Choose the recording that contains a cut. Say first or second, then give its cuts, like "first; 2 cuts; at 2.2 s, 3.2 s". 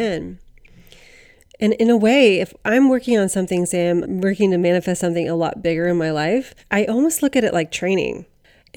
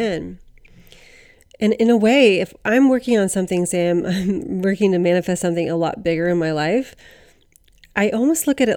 first; 2 cuts; at 4.0 s, 6.6 s